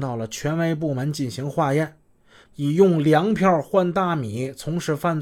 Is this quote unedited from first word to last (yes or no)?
no